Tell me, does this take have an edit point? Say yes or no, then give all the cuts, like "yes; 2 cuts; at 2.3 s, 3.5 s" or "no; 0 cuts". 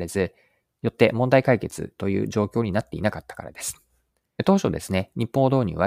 yes; 1 cut; at 4.4 s